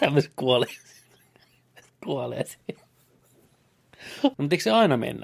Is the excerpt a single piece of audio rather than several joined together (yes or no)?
no